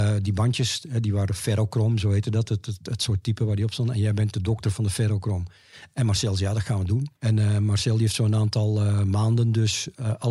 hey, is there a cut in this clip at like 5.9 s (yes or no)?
no